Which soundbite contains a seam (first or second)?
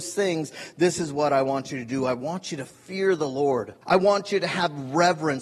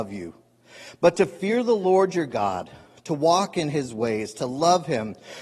first